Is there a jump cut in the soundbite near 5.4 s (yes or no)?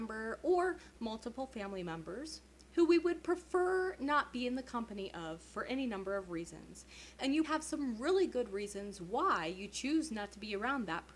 no